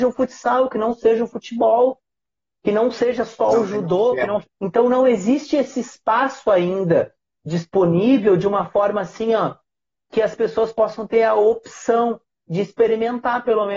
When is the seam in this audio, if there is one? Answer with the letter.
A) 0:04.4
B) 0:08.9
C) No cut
A